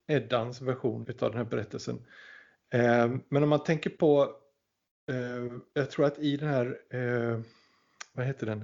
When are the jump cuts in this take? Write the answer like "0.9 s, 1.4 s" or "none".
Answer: 1.0 s